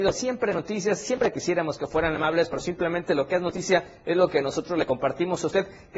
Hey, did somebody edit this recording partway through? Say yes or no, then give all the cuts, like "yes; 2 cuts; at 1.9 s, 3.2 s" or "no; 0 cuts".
no; 0 cuts